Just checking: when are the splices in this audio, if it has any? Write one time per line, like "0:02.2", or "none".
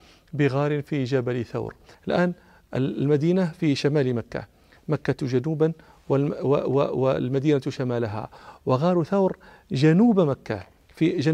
0:01.9